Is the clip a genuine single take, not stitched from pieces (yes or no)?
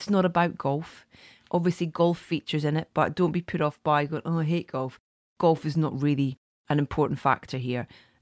yes